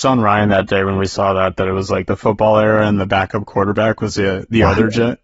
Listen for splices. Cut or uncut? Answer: uncut